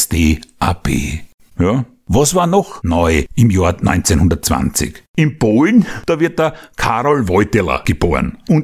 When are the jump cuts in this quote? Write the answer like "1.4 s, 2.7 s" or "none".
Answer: none